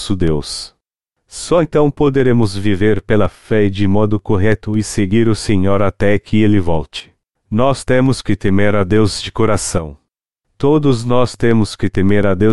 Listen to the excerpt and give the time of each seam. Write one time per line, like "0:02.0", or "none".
0:07.4